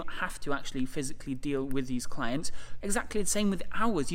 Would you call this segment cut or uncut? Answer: cut